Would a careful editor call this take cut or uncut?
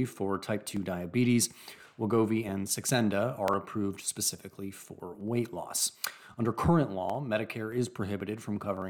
uncut